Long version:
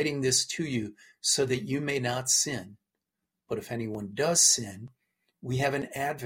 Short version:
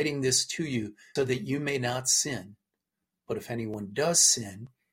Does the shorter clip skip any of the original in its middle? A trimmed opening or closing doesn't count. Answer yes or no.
yes